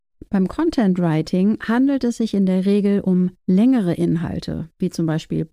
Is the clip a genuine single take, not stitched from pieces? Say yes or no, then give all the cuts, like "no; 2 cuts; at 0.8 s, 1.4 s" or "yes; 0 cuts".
yes; 0 cuts